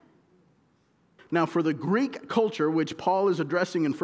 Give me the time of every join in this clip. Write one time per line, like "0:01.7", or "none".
0:01.2